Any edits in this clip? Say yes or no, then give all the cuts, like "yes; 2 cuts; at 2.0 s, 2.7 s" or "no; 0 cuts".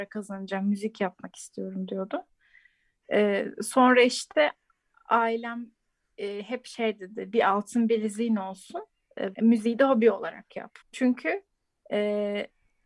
yes; 2 cuts; at 9.3 s, 10.8 s